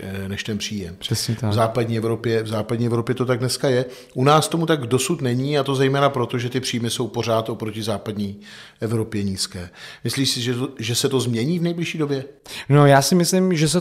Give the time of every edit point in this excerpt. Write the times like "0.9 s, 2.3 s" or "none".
none